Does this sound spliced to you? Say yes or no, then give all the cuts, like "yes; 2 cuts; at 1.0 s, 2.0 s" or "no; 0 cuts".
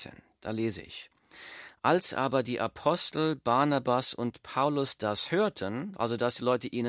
no; 0 cuts